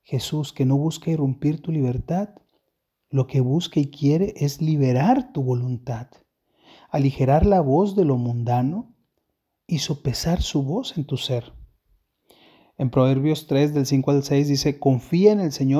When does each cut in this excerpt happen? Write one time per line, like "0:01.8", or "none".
none